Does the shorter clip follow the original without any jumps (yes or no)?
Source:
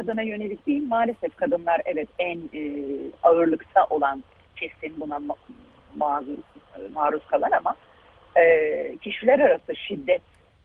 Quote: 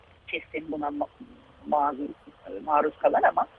yes